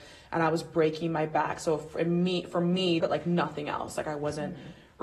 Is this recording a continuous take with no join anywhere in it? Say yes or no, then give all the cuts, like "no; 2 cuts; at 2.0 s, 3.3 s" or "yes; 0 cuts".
no; 1 cut; at 3.0 s